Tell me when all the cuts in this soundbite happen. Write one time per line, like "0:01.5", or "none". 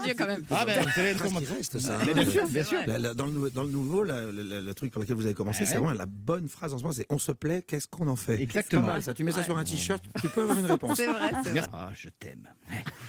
0:01.2
0:11.6